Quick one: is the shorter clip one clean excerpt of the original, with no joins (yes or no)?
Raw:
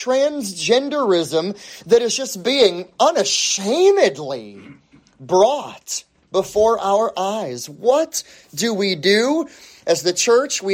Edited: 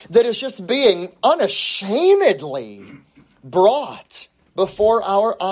yes